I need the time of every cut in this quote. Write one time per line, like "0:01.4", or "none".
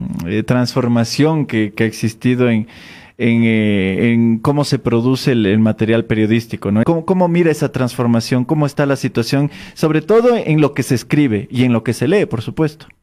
0:06.8